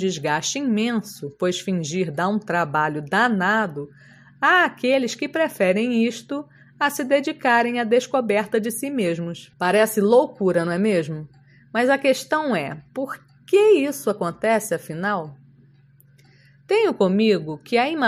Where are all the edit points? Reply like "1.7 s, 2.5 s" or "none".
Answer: 9.5 s